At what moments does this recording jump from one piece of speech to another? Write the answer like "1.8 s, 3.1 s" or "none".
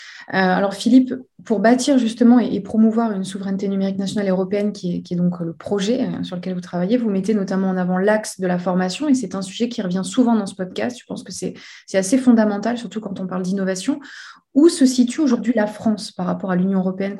none